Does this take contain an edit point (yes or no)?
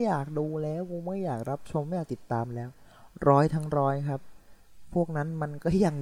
no